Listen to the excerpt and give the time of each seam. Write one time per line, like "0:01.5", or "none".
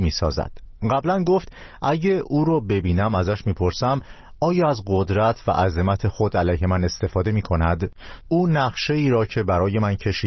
0:08.2

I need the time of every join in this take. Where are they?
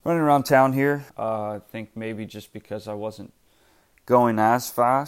0:01.1

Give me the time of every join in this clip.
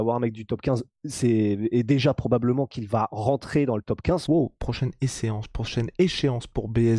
0:04.3

